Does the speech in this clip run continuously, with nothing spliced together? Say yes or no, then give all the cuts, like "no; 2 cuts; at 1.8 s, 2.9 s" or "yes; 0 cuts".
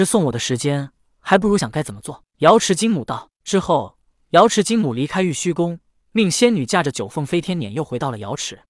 no; 1 cut; at 1.6 s